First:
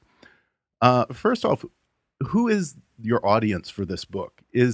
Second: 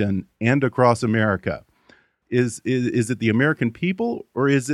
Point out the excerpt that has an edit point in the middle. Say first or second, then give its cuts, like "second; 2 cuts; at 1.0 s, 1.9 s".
second; 1 cut; at 2.2 s